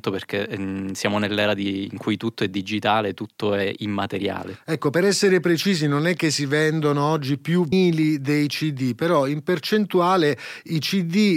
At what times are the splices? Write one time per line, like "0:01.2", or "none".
0:07.7